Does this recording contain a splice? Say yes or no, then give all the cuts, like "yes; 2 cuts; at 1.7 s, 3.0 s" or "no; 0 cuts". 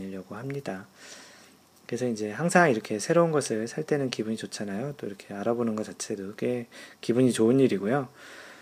no; 0 cuts